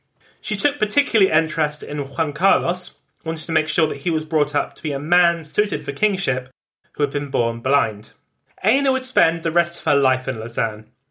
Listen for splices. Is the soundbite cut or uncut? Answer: cut